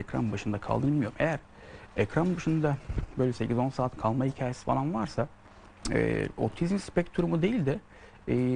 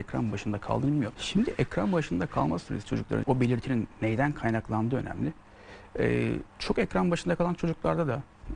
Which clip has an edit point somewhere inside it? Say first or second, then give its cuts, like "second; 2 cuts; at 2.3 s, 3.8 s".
second; 3 cuts; at 1.1 s, 3.2 s, 6.5 s